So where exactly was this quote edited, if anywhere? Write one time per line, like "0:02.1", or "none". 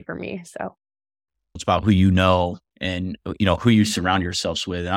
0:01.6